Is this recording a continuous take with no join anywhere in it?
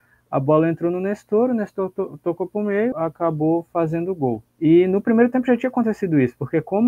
no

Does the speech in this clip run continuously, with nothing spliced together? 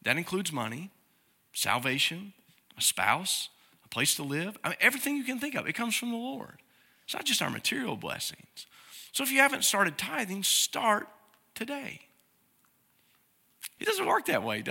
no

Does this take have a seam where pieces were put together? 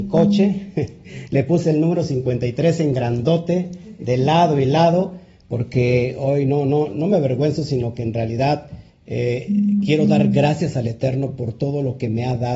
no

